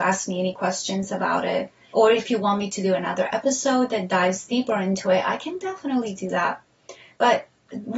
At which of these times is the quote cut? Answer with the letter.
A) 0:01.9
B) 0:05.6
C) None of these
A